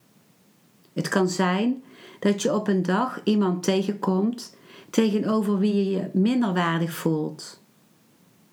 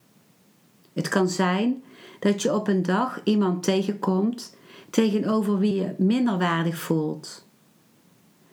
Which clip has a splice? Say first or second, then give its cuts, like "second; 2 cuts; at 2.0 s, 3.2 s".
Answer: second; 1 cut; at 5.7 s